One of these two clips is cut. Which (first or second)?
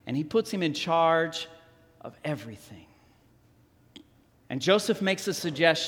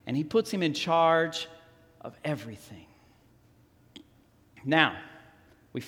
first